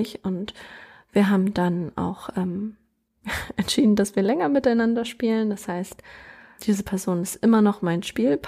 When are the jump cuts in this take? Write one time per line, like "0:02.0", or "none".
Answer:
0:06.6